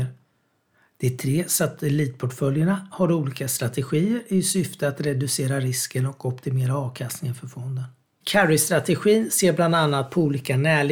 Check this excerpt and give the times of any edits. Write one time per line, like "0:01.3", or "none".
0:08.2